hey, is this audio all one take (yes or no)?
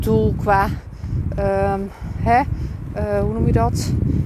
yes